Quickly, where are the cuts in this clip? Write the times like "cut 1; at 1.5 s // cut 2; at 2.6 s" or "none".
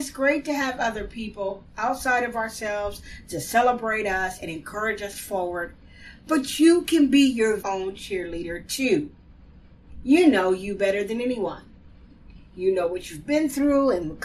cut 1; at 7.6 s